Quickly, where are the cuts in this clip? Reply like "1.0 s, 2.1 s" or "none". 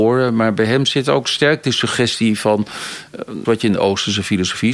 3.4 s